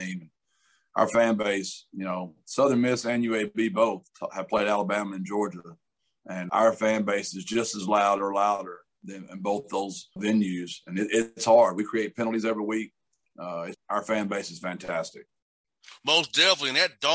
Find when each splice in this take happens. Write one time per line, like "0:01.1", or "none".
0:06.5
0:10.2
0:13.7